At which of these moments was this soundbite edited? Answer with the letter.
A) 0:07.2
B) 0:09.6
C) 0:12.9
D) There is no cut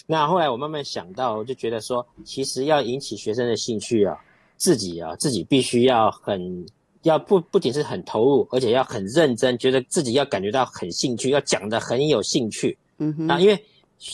D